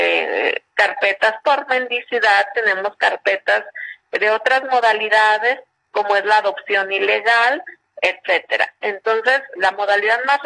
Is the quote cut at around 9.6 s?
yes; 1 cut; at 9.6 s

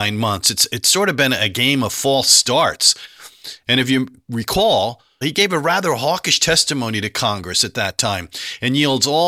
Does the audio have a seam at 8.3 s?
no; 2 cuts; at 3.7 s, 5.2 s

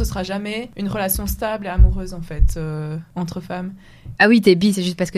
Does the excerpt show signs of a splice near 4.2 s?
yes; 1 cut; at 4.2 s

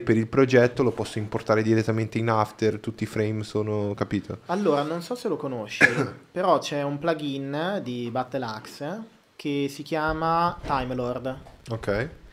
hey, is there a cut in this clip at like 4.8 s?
no; 1 cut; at 10.6 s

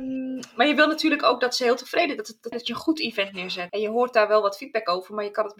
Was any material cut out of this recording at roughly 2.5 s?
yes; 2 cuts; at 2.5 s, 3.7 s

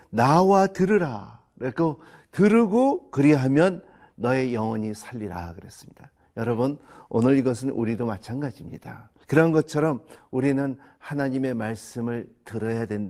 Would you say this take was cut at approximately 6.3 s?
no; 1 cut; at 9.2 s

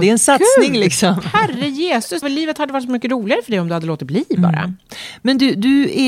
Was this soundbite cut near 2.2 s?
yes; 1 cut; at 2.2 s

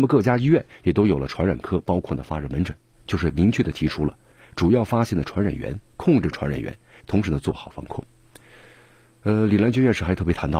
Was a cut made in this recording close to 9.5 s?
no; 2 cuts; at 2.9 s, 7.0 s

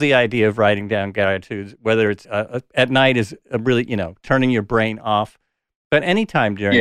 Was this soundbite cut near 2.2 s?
yes; 1 cut; at 2.2 s

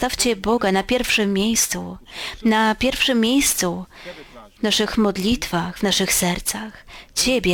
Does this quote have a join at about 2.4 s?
no; 0 cuts

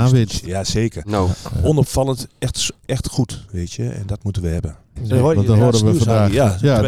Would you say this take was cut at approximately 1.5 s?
no; 1 cut; at 5.0 s

